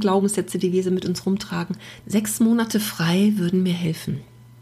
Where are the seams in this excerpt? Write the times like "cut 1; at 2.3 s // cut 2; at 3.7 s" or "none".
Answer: cut 1; at 2.0 s